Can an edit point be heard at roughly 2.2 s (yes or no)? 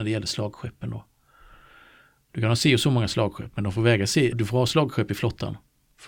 no